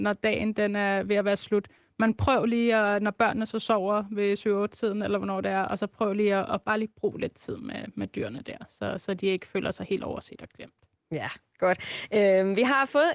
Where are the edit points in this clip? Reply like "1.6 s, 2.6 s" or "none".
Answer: none